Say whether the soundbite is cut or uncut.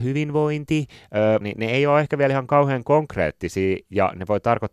cut